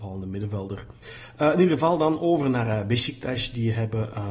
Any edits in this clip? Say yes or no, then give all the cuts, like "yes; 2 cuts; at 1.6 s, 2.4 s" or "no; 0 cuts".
no; 0 cuts